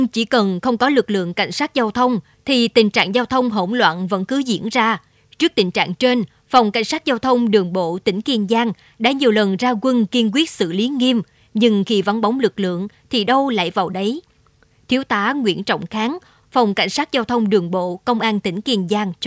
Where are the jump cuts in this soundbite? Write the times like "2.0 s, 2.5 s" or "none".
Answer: 16.4 s